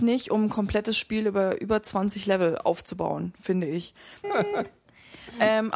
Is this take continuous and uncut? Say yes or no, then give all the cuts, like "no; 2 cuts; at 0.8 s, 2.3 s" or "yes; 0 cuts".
no; 1 cut; at 4.2 s